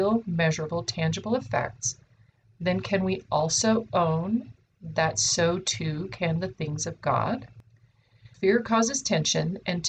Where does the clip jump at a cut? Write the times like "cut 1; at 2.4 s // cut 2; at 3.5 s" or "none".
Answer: cut 1; at 8.3 s

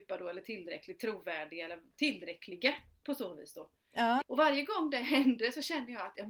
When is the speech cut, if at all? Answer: cut 1; at 4.2 s

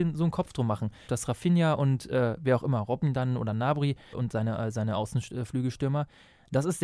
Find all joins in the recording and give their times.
cut 1; at 1.1 s // cut 2; at 4.1 s

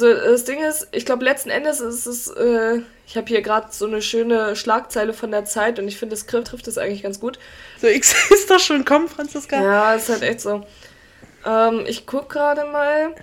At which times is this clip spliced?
cut 1; at 6.4 s // cut 2; at 7.8 s

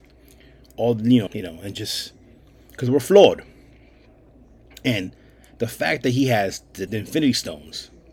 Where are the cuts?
cut 1; at 1.3 s // cut 2; at 6.9 s

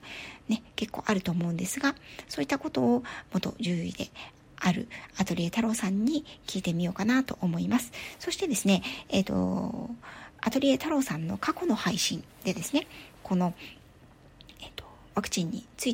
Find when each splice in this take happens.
none

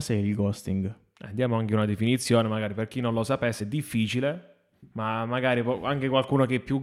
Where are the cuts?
none

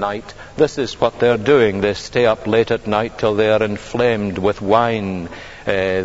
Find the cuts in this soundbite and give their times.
none

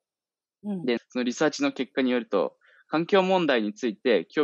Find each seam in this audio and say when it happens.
cut 1; at 1.0 s

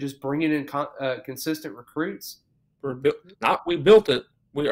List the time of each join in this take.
cut 1; at 2.7 s

